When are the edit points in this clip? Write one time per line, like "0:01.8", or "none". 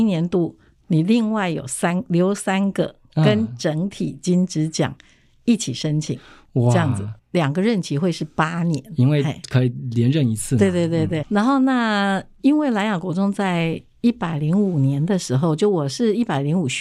0:07.2
0:11.2